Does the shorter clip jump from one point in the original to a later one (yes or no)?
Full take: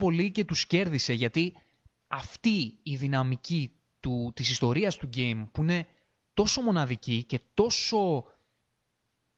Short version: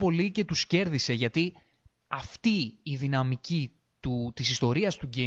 no